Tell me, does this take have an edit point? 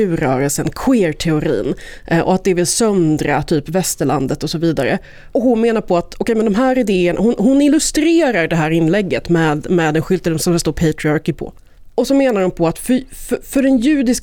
no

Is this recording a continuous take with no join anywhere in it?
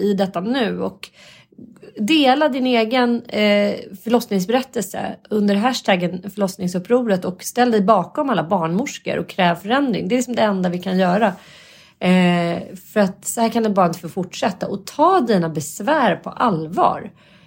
yes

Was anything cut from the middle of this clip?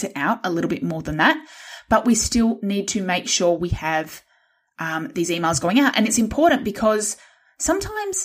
no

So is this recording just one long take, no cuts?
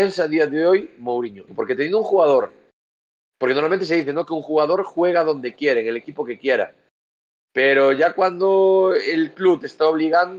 no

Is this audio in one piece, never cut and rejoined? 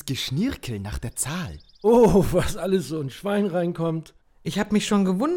yes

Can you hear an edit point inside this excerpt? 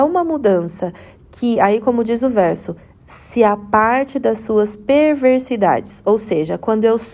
no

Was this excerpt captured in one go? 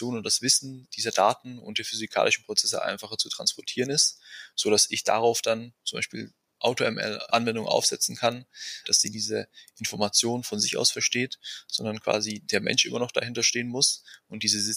no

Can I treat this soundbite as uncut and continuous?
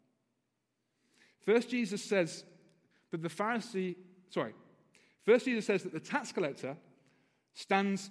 yes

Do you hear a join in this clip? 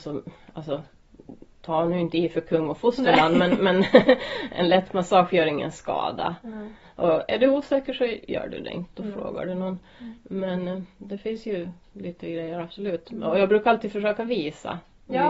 no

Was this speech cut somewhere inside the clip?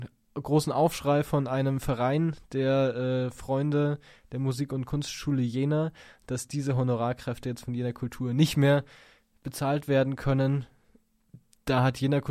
no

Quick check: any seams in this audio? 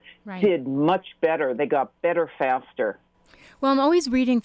no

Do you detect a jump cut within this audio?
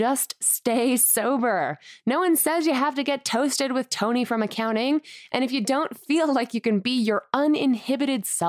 no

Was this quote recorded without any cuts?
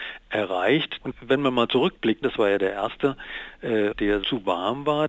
no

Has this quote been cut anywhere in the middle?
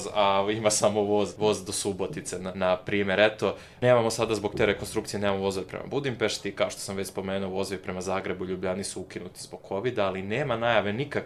no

